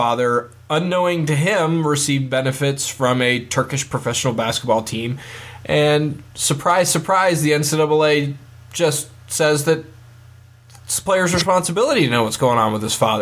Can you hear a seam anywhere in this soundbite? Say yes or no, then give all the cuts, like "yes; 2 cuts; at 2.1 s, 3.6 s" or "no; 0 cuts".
no; 0 cuts